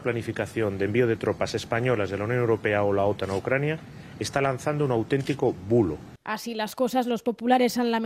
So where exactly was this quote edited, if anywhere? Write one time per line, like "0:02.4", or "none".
0:06.2